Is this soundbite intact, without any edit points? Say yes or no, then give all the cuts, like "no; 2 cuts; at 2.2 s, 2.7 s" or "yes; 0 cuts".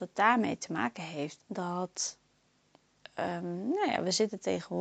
no; 1 cut; at 1.4 s